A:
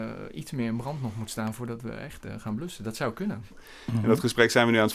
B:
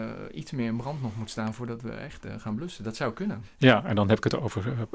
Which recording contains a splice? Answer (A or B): A